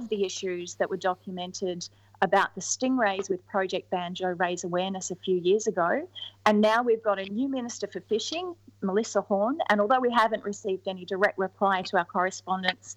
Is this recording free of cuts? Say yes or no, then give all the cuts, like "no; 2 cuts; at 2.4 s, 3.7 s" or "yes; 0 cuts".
yes; 0 cuts